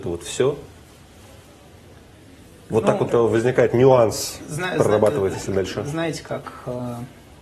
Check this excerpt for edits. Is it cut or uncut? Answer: cut